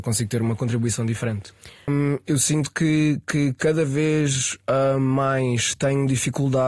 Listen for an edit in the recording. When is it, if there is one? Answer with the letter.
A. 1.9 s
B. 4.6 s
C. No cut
A